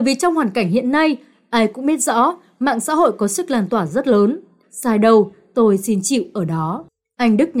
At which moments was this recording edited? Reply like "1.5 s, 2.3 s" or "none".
4.6 s